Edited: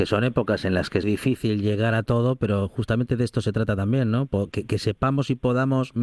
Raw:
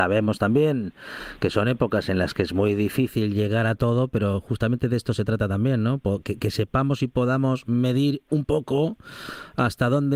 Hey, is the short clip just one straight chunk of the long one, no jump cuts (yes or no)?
no